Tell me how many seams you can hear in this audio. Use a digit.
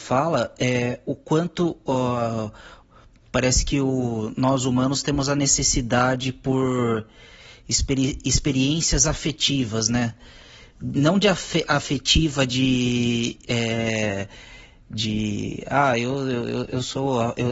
0